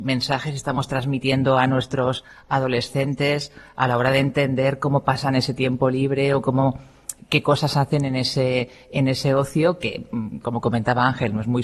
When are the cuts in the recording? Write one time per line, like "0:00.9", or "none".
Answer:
none